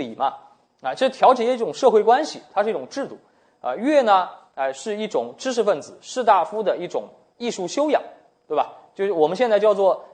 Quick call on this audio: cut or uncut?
uncut